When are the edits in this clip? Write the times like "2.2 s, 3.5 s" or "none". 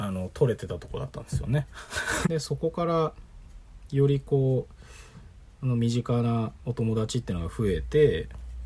2.2 s